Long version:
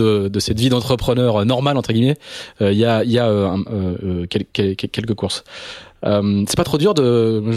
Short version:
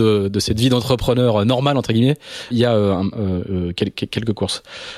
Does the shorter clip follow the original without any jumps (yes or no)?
no